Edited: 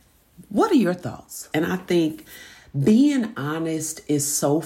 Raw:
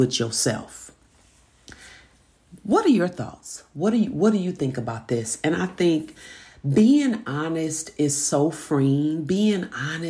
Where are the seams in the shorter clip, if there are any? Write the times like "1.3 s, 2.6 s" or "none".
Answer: 1.5 s